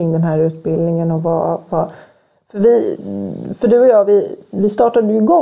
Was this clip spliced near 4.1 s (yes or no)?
no